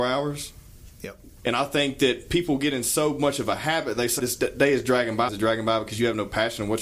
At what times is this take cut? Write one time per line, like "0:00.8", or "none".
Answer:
0:01.4
0:04.2
0:05.3